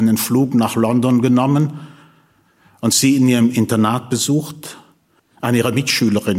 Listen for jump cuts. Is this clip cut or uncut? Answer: cut